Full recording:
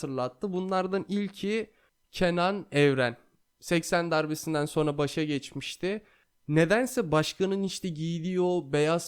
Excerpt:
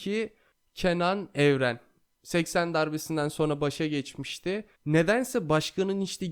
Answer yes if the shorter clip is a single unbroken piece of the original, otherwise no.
no